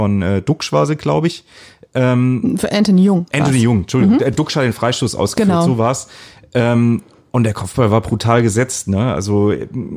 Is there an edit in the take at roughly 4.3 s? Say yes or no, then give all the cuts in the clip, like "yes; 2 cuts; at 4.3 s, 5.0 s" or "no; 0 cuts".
no; 0 cuts